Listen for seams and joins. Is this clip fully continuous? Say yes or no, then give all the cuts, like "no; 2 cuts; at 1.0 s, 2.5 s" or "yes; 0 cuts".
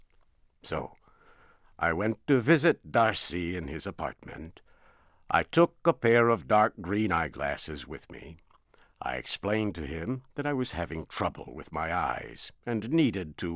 yes; 0 cuts